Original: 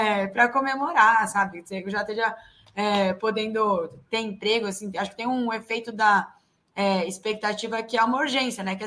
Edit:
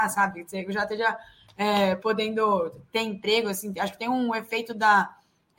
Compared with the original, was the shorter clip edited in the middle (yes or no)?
no